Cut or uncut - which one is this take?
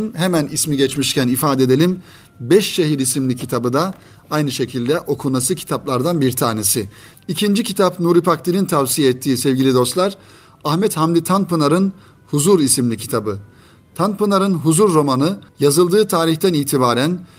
cut